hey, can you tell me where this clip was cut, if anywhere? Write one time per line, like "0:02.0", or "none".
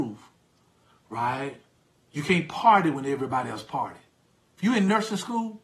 none